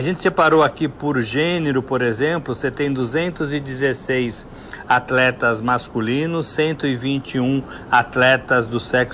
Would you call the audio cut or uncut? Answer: uncut